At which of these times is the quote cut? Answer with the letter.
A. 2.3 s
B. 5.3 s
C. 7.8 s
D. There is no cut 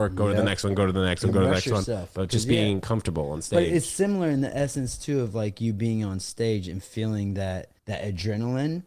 C